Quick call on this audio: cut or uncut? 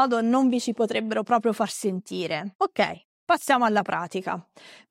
uncut